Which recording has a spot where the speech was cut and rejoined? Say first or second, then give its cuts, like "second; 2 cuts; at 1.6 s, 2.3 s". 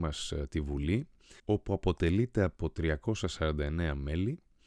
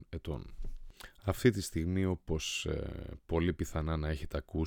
first; 1 cut; at 1.4 s